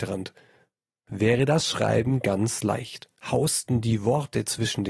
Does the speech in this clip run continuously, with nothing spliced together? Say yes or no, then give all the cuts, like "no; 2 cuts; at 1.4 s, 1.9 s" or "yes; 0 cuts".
no; 1 cut; at 3.2 s